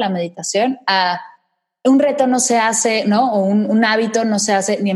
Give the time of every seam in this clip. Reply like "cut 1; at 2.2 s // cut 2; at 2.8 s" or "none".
none